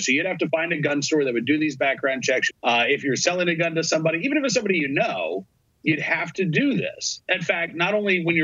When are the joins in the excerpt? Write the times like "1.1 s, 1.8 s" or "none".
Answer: 2.5 s

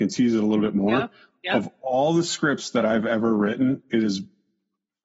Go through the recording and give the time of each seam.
none

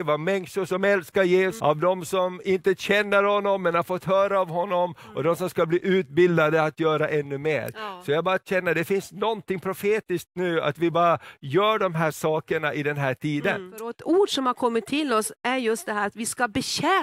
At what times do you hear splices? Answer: 1.6 s

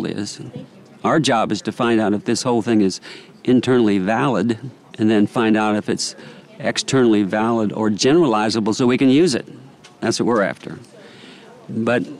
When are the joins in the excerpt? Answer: none

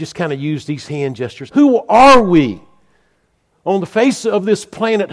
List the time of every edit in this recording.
1.5 s

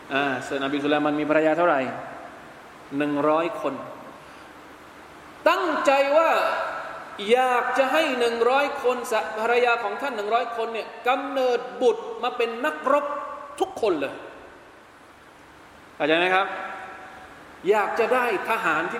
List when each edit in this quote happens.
none

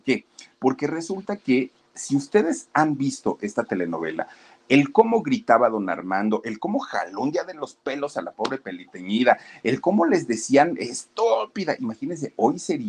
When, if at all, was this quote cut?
none

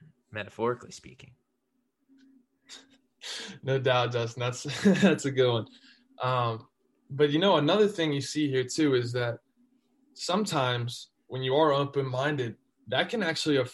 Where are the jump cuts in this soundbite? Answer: none

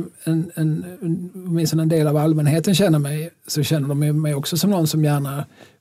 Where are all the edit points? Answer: none

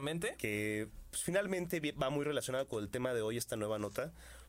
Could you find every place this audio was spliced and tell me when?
none

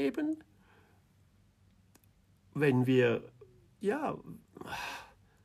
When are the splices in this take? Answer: none

